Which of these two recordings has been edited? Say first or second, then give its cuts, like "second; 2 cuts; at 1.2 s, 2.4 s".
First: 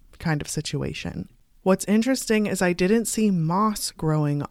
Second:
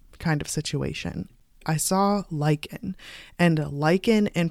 second; 1 cut; at 1.6 s